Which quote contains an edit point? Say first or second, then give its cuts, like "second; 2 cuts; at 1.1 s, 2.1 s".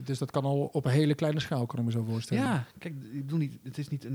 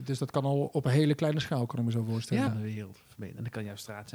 second; 1 cut; at 2.5 s